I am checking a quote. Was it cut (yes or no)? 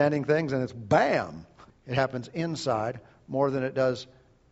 yes